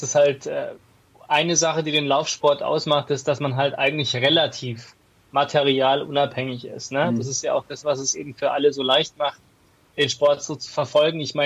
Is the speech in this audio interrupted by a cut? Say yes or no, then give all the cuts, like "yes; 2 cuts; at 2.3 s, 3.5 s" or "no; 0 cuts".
no; 0 cuts